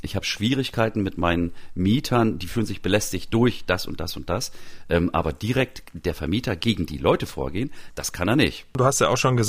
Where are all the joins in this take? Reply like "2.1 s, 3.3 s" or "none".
7.9 s